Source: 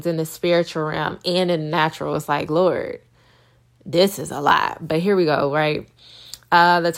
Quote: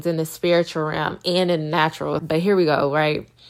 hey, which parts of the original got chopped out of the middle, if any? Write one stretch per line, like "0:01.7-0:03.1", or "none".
0:02.2-0:04.8